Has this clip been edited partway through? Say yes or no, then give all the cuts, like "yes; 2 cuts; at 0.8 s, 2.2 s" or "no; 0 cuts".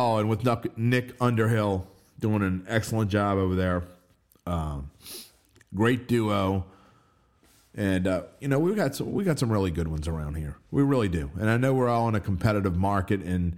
no; 0 cuts